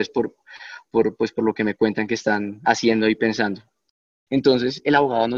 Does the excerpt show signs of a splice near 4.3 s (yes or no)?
yes